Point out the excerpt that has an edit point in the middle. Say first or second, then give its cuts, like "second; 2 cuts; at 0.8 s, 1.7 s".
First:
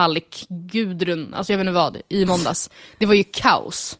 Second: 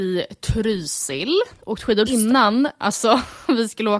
second; 1 cut; at 2.1 s